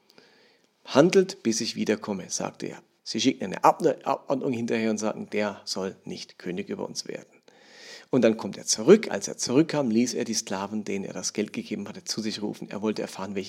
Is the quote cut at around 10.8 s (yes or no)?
no